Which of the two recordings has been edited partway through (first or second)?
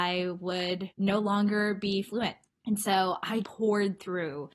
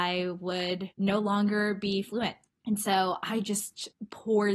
first